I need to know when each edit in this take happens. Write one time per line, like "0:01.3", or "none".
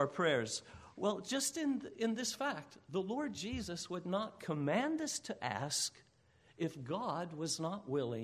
none